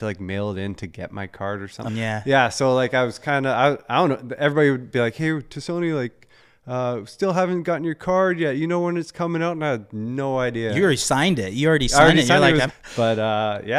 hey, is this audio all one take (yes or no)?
no